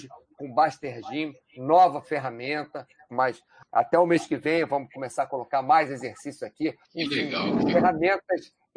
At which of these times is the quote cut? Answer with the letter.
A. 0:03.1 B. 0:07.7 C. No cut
A